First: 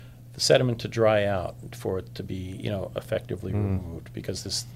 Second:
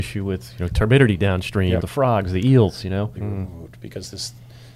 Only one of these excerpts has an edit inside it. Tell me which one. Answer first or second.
second